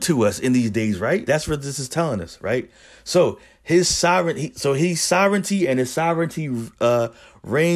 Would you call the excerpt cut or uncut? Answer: cut